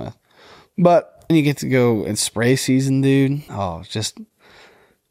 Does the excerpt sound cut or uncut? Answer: cut